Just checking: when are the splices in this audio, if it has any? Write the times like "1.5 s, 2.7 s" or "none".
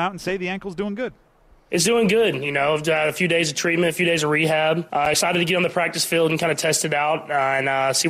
none